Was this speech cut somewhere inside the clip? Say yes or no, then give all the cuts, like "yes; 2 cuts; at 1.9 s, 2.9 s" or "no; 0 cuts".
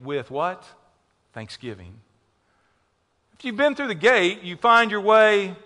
no; 0 cuts